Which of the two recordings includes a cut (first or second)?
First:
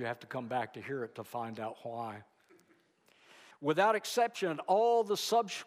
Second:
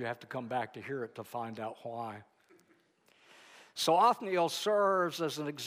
first